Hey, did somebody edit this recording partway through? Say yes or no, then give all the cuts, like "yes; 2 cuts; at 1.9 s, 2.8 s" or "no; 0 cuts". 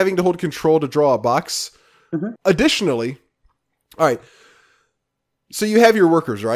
yes; 1 cut; at 2.4 s